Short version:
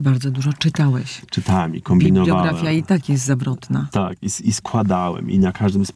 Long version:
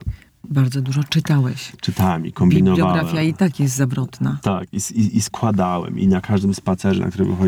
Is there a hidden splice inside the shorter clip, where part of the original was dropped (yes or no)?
yes